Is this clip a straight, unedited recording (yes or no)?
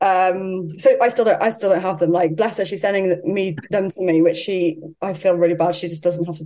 yes